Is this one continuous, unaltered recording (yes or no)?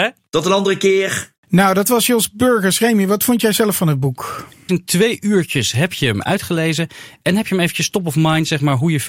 no